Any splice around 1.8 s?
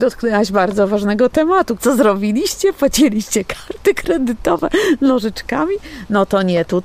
yes; 1 cut; at 1.8 s

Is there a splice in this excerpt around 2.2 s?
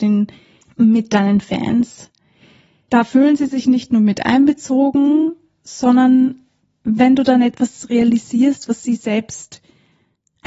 no; 0 cuts

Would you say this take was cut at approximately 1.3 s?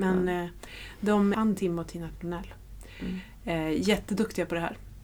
yes; 1 cut; at 1.3 s

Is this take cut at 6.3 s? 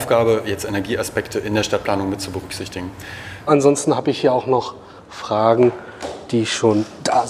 no; 1 cut; at 3.5 s

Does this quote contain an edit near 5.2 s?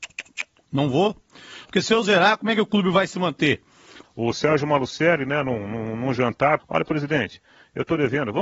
no; 3 cuts; at 1.6 s, 4.0 s, 6.6 s

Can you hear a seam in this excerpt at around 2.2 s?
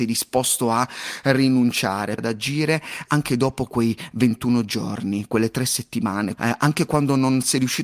yes; 2 cuts; at 2.2 s, 6.4 s

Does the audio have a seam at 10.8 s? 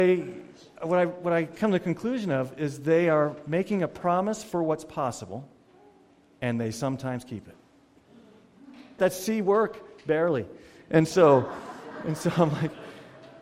no; 1 cut; at 9.0 s

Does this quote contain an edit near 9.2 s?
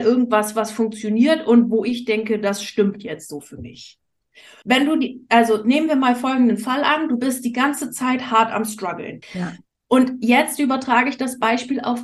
yes; 2 cuts; at 4.6 s, 9.2 s

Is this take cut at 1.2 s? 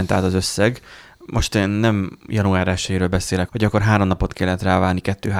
no; 1 cut; at 3.5 s

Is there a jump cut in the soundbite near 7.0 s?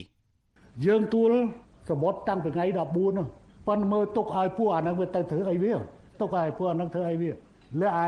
no; 1 cut; at 1.1 s

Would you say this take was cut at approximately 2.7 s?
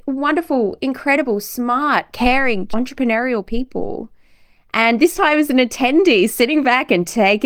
yes; 1 cut; at 2.7 s

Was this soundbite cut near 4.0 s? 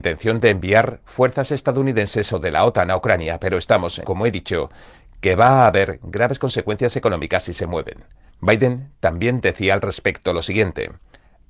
yes; 2 cuts; at 4.0 s, 8.3 s

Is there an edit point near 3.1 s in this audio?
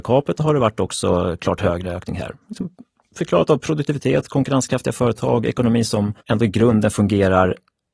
no; 1 cut; at 6.2 s

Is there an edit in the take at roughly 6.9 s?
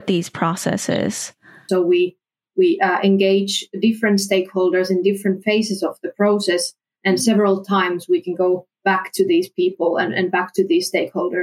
no; 1 cut; at 1.7 s

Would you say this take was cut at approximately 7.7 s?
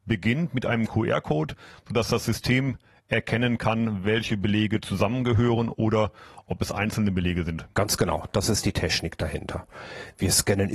yes; 1 cut; at 7.7 s

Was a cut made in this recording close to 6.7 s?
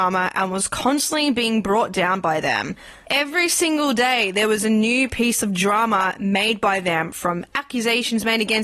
no; 1 cut; at 3.0 s

